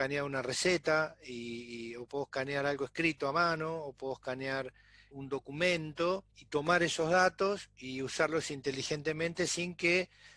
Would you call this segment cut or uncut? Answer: cut